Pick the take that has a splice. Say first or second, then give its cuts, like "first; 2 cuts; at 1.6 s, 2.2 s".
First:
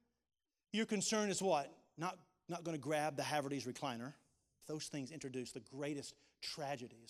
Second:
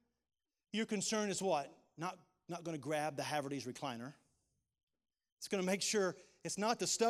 first; 1 cut; at 4.6 s